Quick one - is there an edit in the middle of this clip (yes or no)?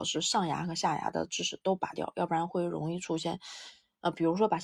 no